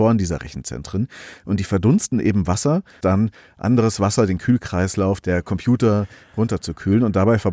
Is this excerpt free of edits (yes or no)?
no